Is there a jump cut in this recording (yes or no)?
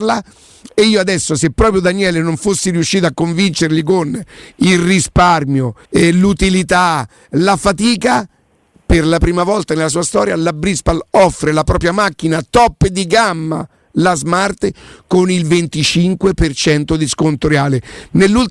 yes